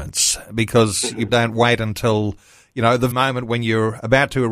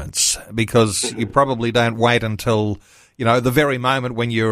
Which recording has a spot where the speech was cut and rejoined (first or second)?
first